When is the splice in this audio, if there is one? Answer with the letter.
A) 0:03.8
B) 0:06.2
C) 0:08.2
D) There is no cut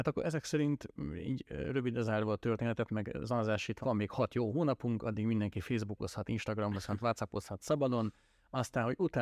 A